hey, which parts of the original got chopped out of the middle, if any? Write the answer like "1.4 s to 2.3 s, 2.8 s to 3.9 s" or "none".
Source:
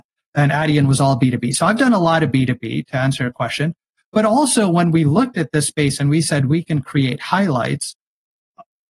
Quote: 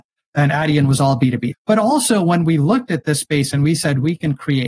1.5 s to 4.0 s

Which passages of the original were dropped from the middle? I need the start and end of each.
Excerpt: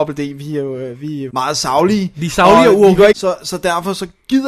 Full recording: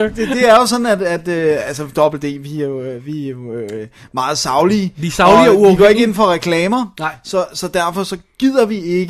3.3 s to 4.1 s, 5.9 s to 7.2 s

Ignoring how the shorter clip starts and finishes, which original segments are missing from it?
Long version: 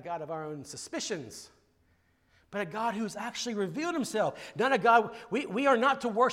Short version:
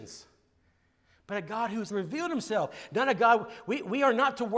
3.1 s to 3.5 s

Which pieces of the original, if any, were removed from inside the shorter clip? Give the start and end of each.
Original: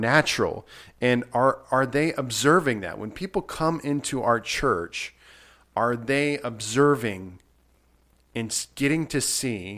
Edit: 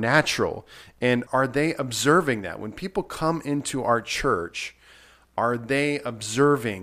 1.3 s to 1.7 s

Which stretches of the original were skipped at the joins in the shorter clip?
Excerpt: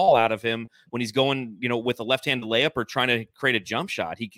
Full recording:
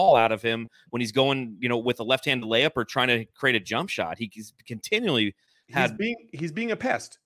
none

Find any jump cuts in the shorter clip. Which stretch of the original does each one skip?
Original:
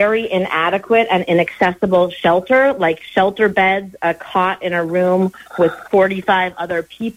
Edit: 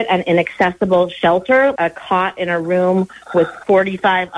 2.8 s to 4.0 s

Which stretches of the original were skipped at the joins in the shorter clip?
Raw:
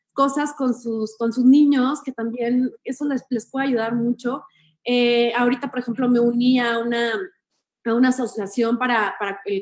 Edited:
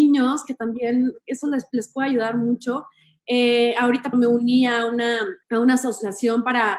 5.7 s to 6.1 s, 7.4 s to 7.8 s

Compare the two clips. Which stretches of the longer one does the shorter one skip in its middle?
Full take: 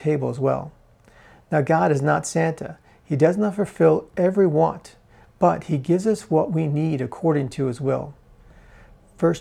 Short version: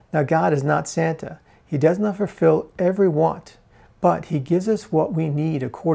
none

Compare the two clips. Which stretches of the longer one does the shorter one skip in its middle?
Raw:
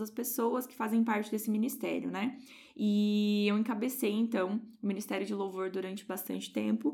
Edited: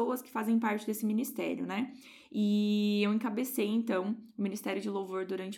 none

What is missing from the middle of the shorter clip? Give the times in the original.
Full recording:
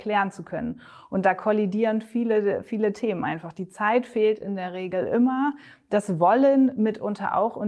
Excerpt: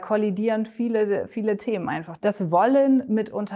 3.5 s to 5.9 s

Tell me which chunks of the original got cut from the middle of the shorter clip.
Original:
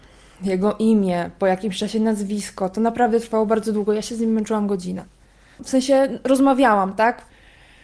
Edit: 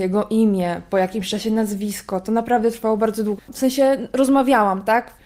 3.9 s to 5.5 s

